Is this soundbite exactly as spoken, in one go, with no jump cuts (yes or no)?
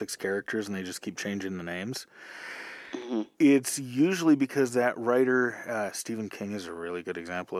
yes